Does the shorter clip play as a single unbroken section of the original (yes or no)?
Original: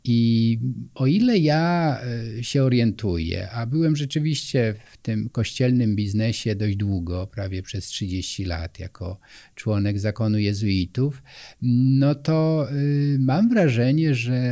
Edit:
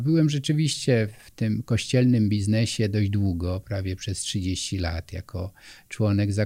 yes